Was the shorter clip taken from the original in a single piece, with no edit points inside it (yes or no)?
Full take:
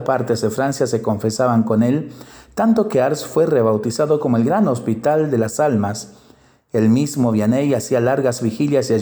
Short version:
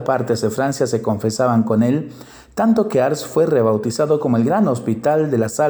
yes